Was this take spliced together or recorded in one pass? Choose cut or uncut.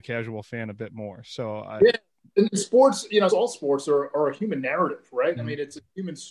cut